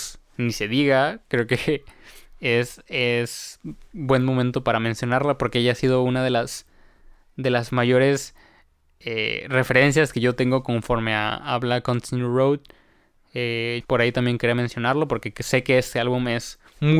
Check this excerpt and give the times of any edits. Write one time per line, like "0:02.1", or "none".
0:13.8